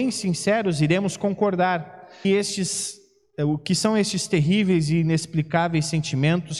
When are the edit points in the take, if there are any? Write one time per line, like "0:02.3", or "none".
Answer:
0:02.2